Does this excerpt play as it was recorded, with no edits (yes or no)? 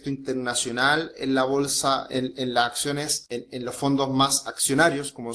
no